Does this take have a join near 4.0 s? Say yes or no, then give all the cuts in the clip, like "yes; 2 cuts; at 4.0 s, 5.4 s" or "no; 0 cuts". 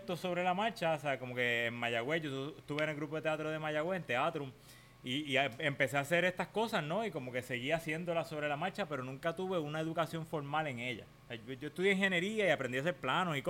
no; 0 cuts